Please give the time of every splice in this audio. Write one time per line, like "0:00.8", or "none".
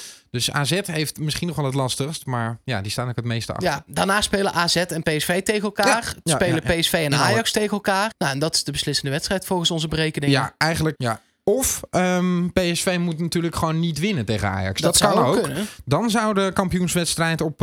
0:08.1
0:10.9